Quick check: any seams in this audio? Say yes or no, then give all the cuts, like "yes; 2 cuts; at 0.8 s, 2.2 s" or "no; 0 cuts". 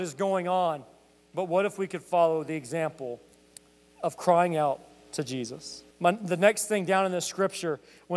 yes; 1 cut; at 5.9 s